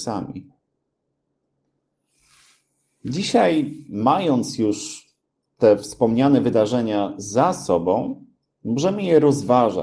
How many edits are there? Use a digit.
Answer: 0